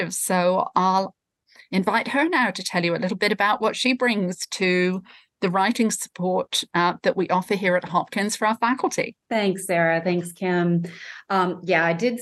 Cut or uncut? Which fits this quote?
cut